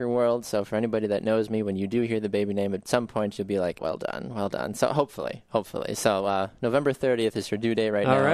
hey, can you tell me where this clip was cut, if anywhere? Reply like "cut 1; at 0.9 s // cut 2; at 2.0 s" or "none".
cut 1; at 3.8 s